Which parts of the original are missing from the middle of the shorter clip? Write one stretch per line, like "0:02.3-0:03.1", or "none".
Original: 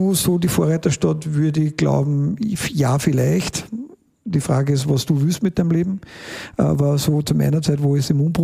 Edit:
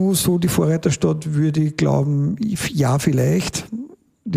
none